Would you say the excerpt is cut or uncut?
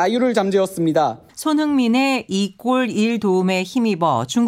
cut